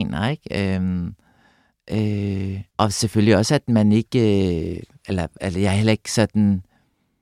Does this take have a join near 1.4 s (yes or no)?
no